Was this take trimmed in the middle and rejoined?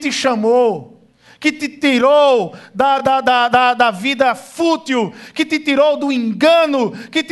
no; 0 cuts

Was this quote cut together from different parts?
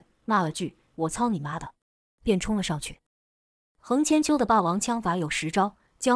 no; 0 cuts

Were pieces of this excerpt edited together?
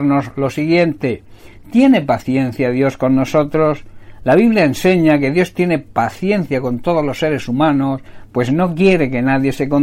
no; 0 cuts

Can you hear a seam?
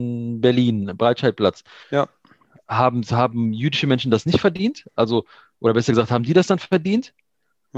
yes; 2 cuts; at 1.8 s, 4.9 s

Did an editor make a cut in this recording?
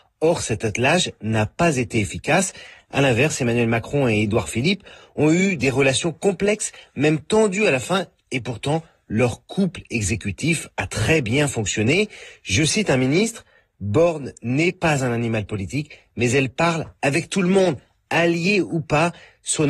no; 0 cuts

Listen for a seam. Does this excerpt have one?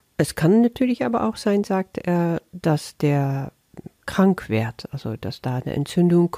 no; 0 cuts

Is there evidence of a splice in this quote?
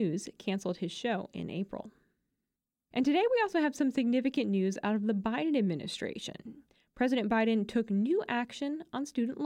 no; 0 cuts

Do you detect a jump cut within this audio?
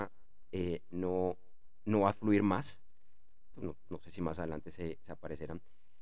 yes; 1 cut; at 3.5 s

